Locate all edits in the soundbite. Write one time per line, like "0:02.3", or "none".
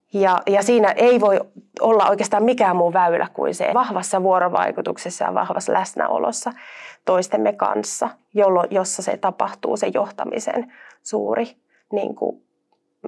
0:03.7